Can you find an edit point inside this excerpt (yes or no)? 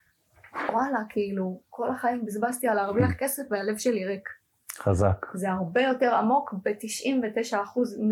no